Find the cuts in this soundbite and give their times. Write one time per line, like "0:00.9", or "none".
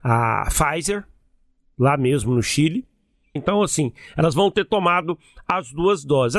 0:03.4